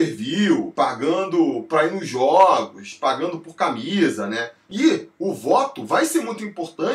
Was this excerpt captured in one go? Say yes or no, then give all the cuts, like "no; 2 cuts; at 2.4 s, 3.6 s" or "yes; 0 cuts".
no; 1 cut; at 4.7 s